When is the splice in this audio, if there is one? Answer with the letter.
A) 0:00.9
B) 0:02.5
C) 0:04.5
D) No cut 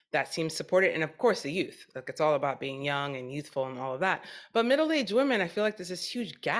D